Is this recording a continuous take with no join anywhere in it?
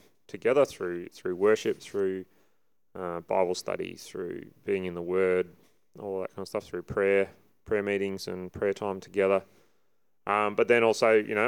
yes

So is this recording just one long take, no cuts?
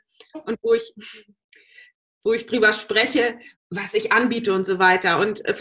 no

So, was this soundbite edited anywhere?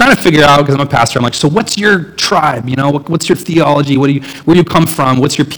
no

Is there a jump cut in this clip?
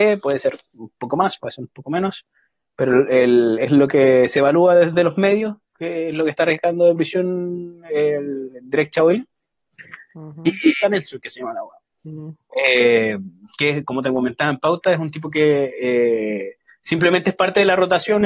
yes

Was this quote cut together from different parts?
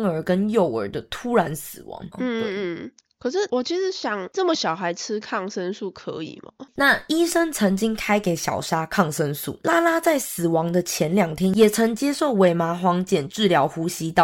yes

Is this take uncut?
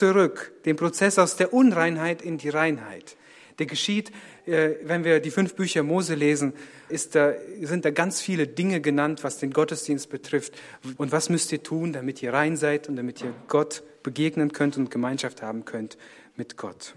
no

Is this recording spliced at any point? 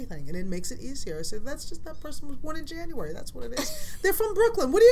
no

